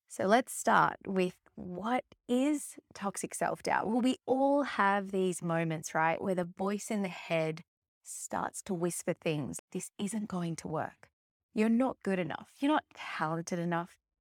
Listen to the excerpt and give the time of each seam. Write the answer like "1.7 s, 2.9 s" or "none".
9.6 s